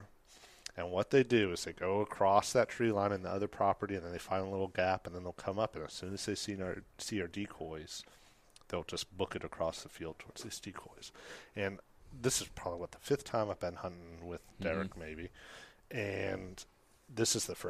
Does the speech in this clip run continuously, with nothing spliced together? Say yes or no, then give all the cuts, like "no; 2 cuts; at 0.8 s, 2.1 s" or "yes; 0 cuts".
yes; 0 cuts